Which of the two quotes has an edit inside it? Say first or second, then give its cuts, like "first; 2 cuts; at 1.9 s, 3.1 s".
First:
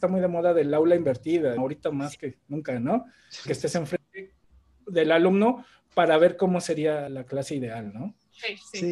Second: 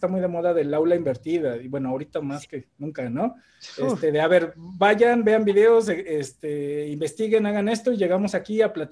first; 3 cuts; at 1.6 s, 3.5 s, 7.1 s